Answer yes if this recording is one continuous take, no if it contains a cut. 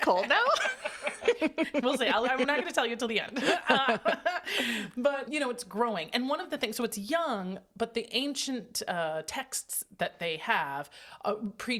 no